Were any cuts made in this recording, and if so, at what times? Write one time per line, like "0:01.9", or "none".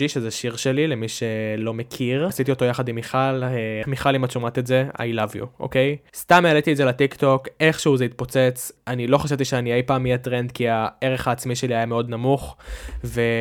0:06.1
0:08.8